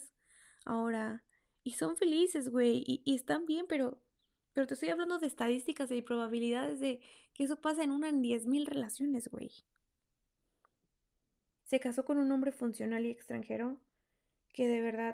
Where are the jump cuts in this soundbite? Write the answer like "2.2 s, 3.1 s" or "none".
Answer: 11.6 s